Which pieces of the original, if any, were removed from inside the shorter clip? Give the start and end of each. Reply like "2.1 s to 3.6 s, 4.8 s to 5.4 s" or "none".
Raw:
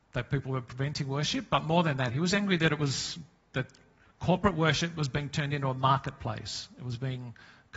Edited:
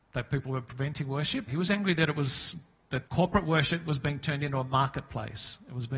1.5 s to 2.1 s, 3.7 s to 4.2 s